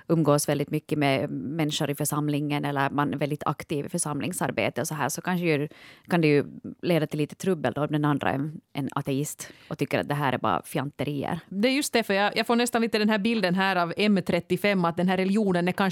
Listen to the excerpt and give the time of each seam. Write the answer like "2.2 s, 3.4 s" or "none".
none